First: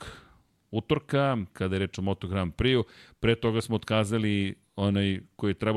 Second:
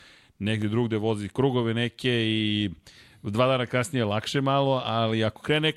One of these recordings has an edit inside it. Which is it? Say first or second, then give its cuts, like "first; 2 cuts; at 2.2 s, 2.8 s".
first; 1 cut; at 1.5 s